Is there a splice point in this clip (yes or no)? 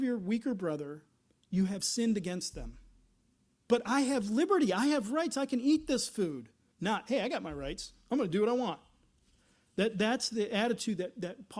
yes